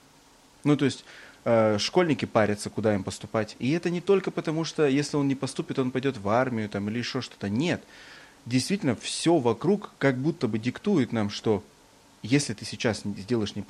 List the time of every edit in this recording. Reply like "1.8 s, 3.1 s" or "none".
none